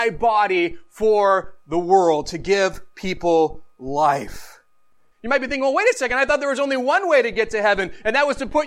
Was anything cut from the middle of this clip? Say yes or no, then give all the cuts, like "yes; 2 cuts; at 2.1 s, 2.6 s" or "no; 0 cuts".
yes; 1 cut; at 5.1 s